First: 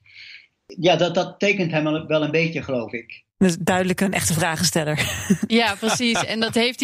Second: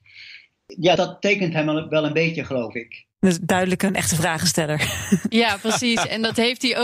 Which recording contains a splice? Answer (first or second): second